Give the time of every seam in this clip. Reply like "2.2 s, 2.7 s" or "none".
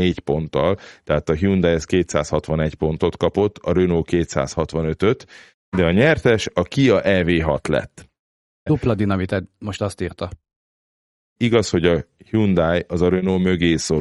8.7 s, 11.4 s